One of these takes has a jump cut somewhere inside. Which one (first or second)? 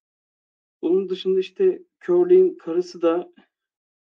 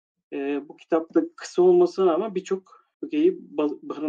second